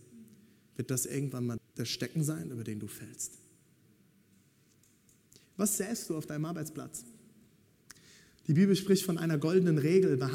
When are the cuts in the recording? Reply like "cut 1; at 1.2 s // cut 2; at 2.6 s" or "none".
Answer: cut 1; at 1.6 s